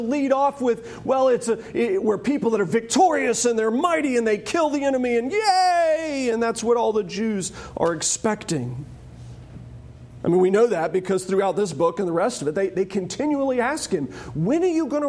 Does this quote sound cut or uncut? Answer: uncut